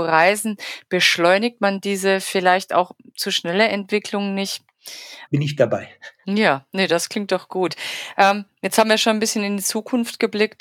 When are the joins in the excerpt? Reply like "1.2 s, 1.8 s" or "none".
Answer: 5.3 s